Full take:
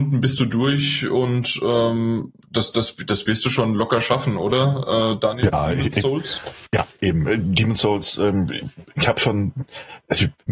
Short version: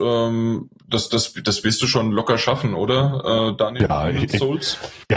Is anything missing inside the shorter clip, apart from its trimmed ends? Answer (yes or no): no